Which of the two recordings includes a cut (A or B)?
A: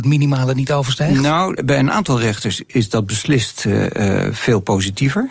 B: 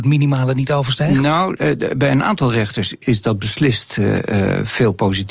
A